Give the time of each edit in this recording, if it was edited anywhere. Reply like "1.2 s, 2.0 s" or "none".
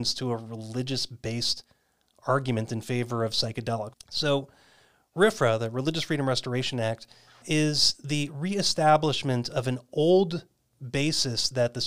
3.9 s, 7.4 s